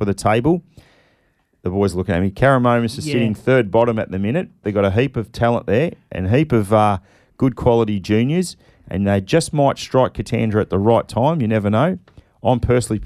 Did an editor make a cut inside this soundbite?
yes; 1 cut; at 4.6 s

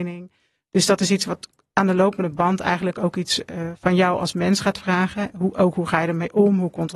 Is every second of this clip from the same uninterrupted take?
yes; 0 cuts

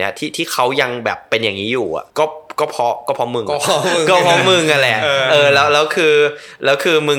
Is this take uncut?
no; 1 cut; at 2.1 s

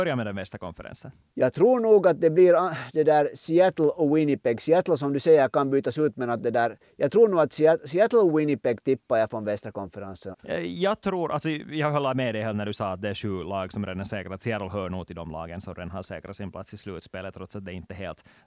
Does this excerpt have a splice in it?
yes; 1 cut; at 10.3 s

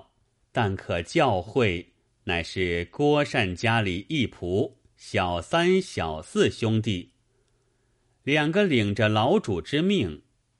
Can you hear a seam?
yes; 1 cut; at 2.1 s

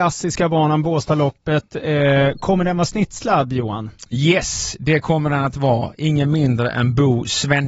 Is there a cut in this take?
no; 0 cuts

